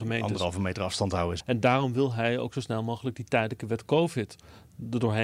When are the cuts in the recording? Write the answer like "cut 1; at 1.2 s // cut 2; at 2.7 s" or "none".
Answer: cut 1; at 1.4 s

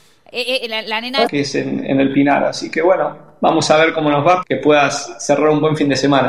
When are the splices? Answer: cut 1; at 1.3 s // cut 2; at 4.4 s

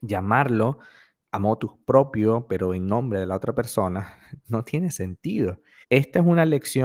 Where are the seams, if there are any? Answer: cut 1; at 5.8 s

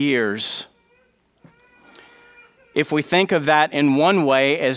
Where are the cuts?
none

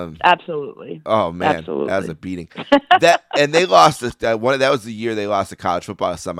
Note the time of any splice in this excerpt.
none

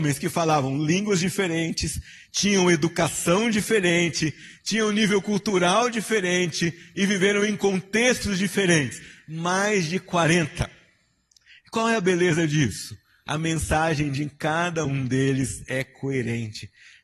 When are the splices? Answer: none

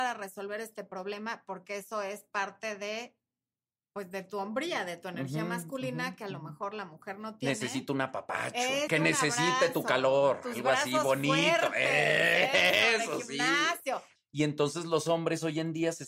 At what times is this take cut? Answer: cut 1; at 8.9 s // cut 2; at 14.2 s

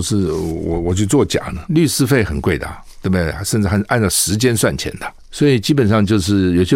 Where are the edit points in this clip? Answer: cut 1; at 1.6 s

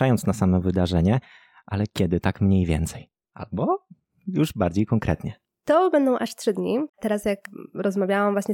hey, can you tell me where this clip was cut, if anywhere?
cut 1; at 5.6 s // cut 2; at 6.9 s

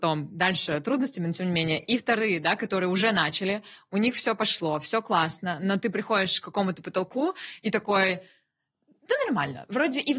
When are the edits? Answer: none

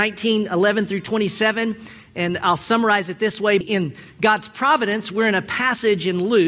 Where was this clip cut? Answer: cut 1; at 3.6 s

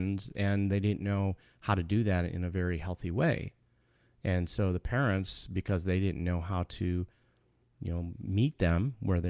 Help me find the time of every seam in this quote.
none

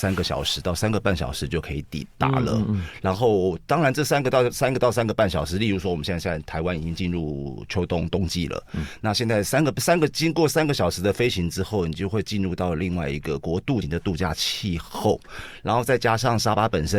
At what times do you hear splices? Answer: cut 1; at 13.8 s

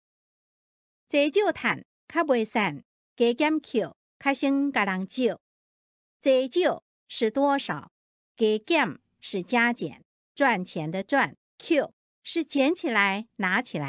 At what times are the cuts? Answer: cut 1; at 10.2 s // cut 2; at 11.5 s

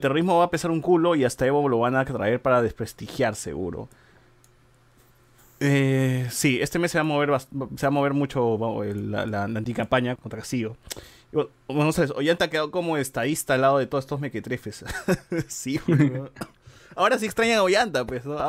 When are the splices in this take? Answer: cut 1; at 10.2 s

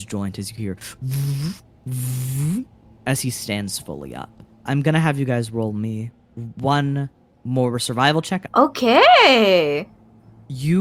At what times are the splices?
cut 1; at 4.7 s // cut 2; at 8.5 s

